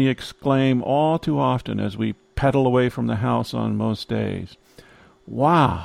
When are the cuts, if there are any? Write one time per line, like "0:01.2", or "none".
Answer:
none